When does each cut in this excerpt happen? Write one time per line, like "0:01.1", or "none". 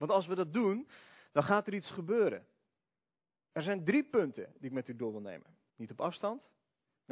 0:05.7